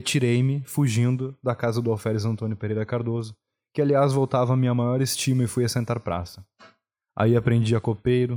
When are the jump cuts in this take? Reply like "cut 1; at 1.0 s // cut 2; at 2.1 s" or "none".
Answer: cut 1; at 7.0 s